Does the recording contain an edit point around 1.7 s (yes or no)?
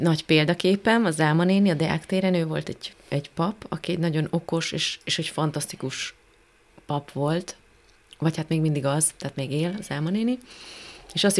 no